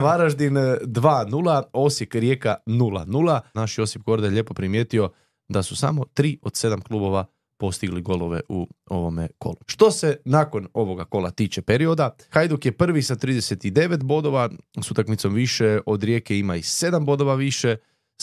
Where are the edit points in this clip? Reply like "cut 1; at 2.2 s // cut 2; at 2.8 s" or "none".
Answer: cut 1; at 3.5 s // cut 2; at 9.6 s // cut 3; at 12.3 s

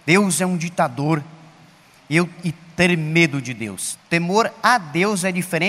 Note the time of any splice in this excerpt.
cut 1; at 3.9 s

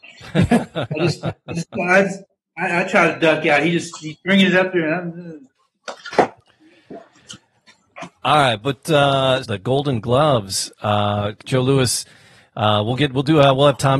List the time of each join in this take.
cut 1; at 9.4 s

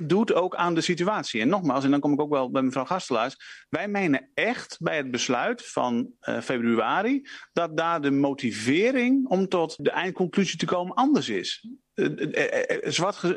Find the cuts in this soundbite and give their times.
cut 1; at 9.8 s

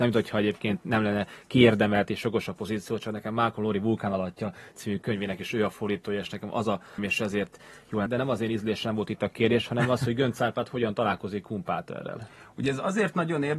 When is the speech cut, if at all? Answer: cut 1; at 7.0 s // cut 2; at 8.1 s

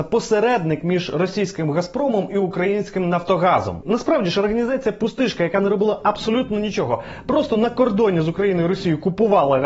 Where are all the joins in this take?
none

